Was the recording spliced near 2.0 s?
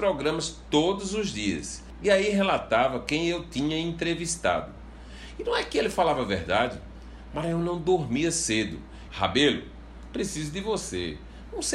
no; 1 cut; at 9.1 s

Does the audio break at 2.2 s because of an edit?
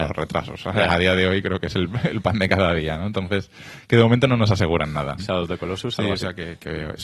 no; 1 cut; at 5.2 s

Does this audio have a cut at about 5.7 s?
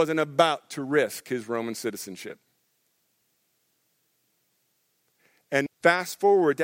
yes; 1 cut; at 5.7 s

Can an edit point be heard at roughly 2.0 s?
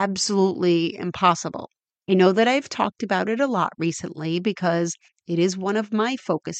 yes; 1 cut; at 2.0 s

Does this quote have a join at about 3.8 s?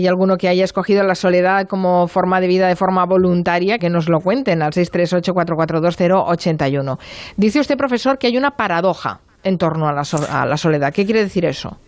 yes; 1 cut; at 3.8 s

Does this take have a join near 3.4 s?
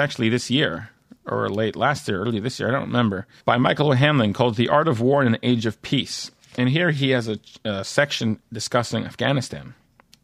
yes; 1 cut; at 3.4 s

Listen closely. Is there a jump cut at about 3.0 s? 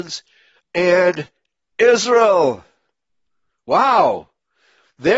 no; 0 cuts

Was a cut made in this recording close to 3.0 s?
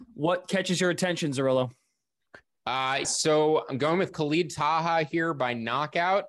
yes; 1 cut; at 3.0 s

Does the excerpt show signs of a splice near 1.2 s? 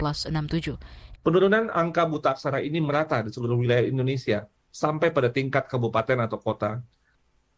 yes; 1 cut; at 1.2 s

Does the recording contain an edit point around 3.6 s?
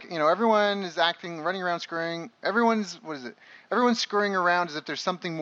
no; 0 cuts

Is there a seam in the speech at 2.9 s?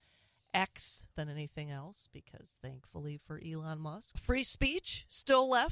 no; 2 cuts; at 1.1 s, 4.1 s

